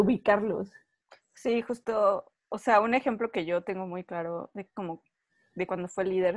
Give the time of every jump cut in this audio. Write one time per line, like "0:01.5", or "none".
none